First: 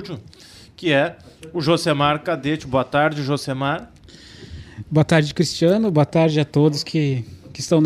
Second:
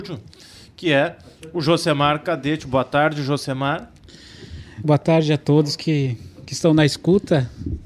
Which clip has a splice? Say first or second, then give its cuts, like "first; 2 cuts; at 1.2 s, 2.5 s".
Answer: second; 1 cut; at 4.8 s